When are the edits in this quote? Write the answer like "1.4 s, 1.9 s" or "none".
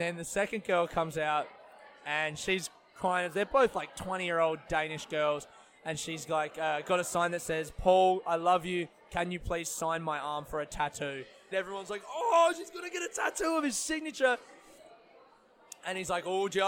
11.5 s